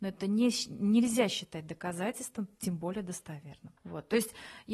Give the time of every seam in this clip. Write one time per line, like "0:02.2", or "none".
0:03.8